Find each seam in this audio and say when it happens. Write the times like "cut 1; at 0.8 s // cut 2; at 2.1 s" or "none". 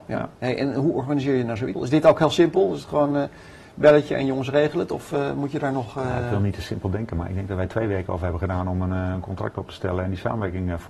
cut 1; at 1.7 s

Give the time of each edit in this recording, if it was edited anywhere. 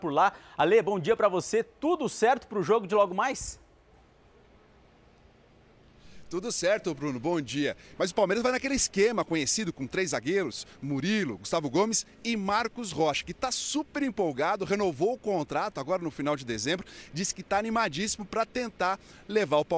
cut 1; at 8.0 s

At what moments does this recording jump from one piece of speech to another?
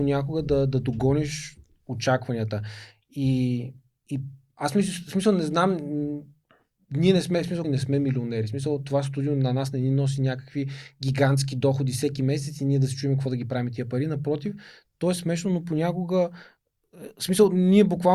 cut 1; at 7.6 s

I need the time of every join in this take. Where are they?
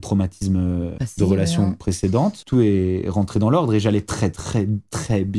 none

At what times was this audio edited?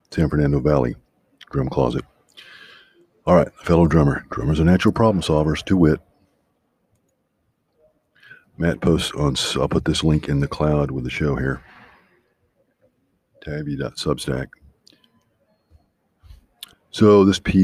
cut 1; at 16.7 s

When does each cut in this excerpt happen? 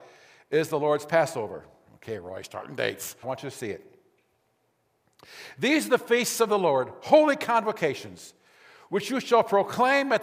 cut 1; at 3.2 s

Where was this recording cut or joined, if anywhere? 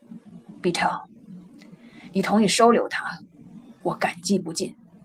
none

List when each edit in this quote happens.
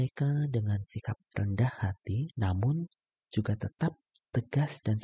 none

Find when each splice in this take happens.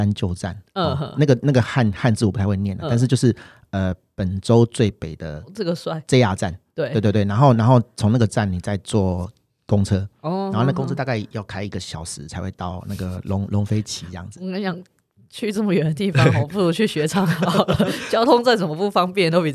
none

